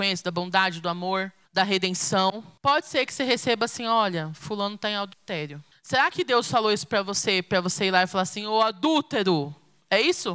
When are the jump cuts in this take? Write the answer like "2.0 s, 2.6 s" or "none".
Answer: none